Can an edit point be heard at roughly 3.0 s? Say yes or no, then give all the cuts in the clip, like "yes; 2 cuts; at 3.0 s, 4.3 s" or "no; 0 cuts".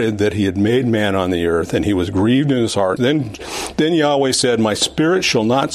yes; 1 cut; at 3.0 s